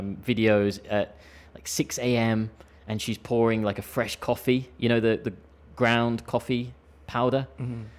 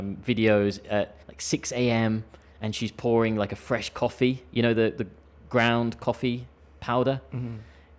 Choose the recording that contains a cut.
second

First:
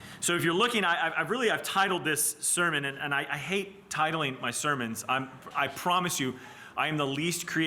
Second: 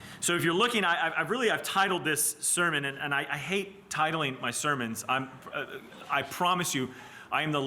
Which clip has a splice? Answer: first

